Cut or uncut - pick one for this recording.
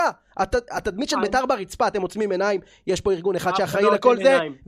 uncut